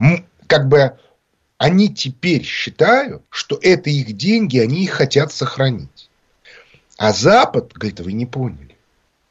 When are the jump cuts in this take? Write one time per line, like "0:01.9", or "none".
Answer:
0:03.3
0:08.0